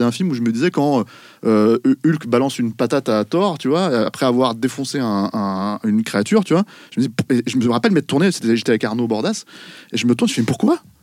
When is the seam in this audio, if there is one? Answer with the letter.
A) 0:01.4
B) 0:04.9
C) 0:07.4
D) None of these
D